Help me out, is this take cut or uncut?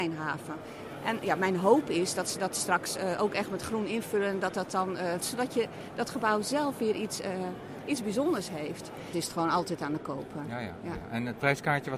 cut